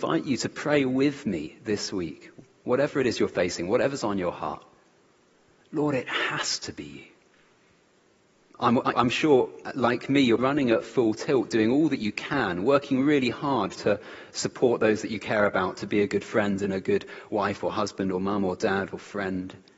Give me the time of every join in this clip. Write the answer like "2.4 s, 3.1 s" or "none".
8.9 s, 10.4 s